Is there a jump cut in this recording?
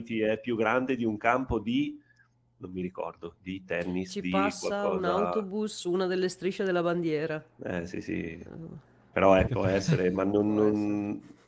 yes; 1 cut; at 9.5 s

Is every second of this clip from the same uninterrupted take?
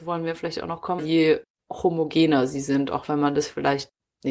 no; 1 cut; at 1.0 s

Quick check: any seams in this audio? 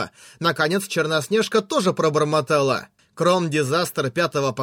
yes; 1 cut; at 3.0 s

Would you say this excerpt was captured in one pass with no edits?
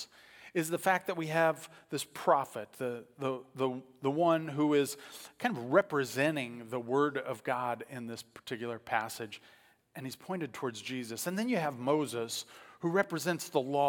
yes; 0 cuts

